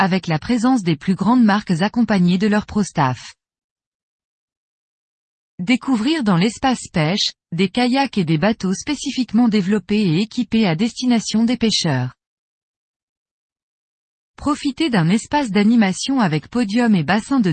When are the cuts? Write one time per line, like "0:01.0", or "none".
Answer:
none